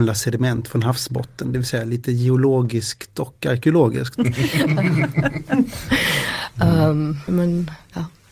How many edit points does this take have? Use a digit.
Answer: 2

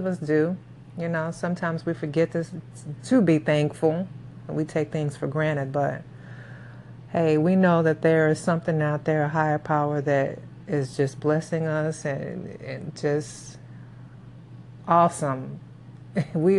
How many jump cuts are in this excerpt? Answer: 0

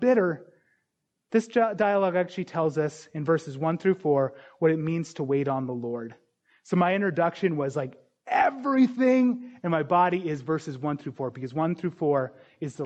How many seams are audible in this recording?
0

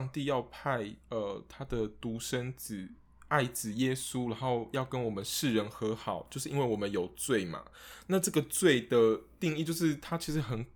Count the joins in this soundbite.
1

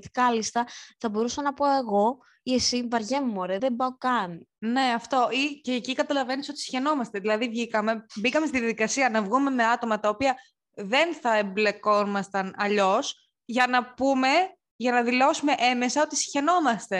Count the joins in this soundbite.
1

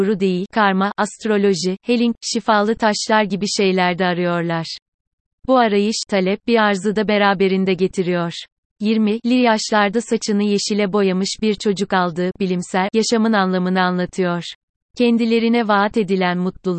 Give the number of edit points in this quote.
2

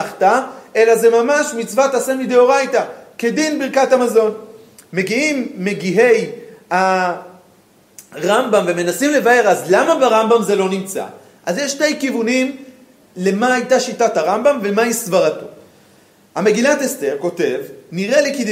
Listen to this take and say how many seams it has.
0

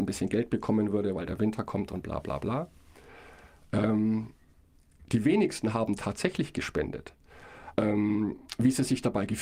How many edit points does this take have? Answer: 1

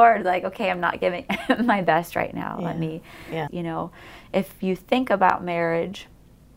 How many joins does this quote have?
1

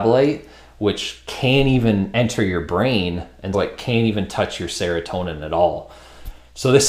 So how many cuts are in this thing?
1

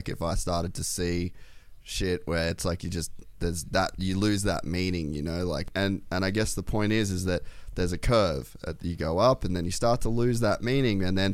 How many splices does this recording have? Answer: 0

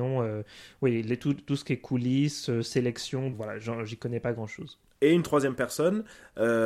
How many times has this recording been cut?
1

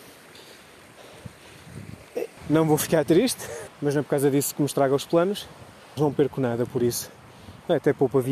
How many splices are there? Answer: 3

